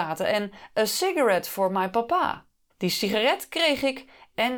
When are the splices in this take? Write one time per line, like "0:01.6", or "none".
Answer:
0:02.7